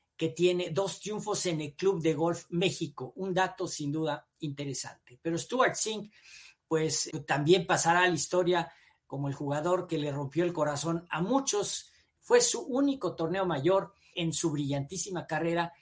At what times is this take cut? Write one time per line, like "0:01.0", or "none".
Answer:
0:07.1
0:12.2
0:14.1